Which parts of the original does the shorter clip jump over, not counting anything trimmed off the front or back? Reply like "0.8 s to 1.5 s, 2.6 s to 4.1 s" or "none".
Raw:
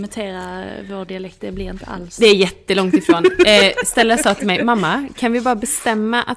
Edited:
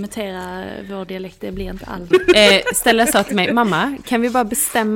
2.1 s to 3.2 s